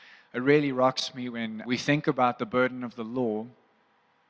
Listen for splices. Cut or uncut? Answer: cut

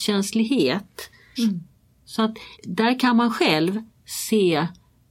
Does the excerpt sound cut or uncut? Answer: cut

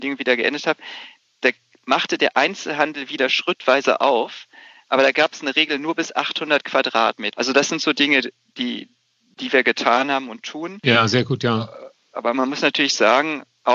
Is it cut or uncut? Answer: cut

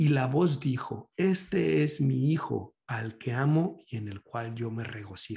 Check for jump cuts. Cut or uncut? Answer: uncut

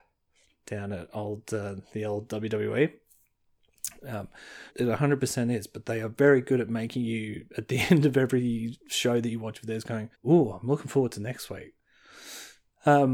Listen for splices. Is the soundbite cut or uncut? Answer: cut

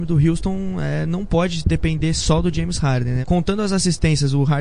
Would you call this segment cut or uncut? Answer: cut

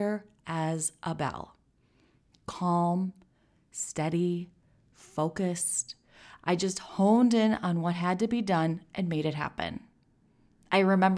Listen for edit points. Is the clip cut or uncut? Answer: cut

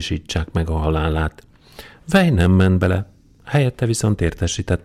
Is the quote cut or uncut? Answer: uncut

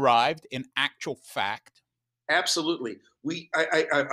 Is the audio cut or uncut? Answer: uncut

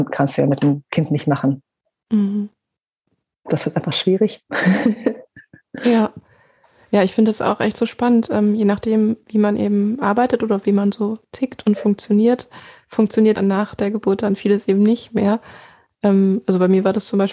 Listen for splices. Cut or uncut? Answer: cut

